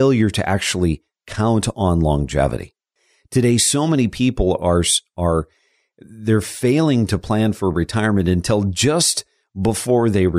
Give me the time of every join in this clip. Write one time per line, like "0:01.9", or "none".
none